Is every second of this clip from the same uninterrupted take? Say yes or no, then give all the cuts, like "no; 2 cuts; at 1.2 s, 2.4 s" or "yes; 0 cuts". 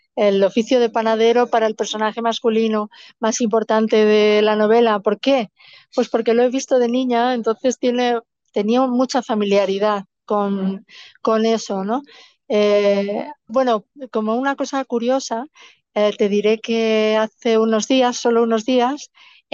no; 1 cut; at 13.5 s